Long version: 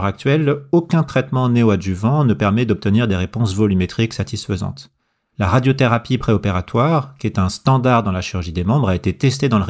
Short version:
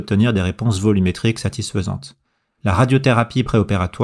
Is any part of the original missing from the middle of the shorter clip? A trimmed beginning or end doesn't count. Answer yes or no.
no